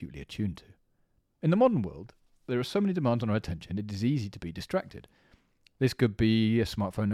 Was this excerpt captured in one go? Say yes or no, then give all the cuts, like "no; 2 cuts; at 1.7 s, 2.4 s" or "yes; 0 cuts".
yes; 0 cuts